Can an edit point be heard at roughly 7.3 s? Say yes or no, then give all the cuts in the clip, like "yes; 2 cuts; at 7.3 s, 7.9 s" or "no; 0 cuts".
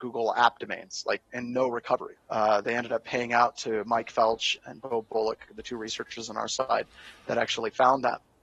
no; 2 cuts; at 2.2 s, 4.6 s